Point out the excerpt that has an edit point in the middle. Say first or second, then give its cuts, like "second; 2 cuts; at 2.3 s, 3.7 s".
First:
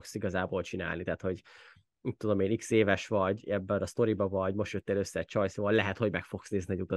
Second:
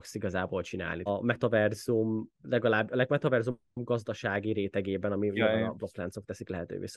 second; 1 cut; at 1.1 s